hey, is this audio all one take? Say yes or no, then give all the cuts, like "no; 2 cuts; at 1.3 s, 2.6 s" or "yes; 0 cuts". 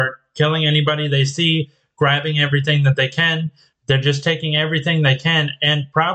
no; 1 cut; at 3.7 s